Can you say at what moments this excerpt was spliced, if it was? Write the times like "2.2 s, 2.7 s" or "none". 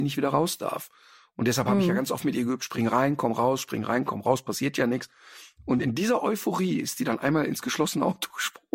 none